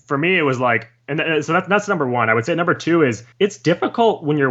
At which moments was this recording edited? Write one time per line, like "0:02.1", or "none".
0:03.3